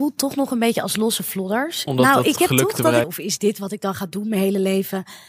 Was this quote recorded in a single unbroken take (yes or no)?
no